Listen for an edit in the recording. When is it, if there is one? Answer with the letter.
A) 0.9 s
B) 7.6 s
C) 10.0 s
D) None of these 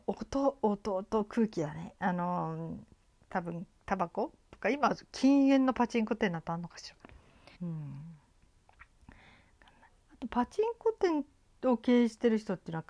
B